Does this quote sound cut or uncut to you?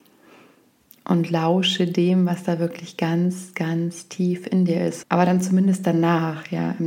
cut